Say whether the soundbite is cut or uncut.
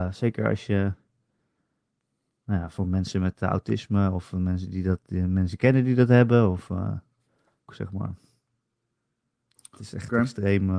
cut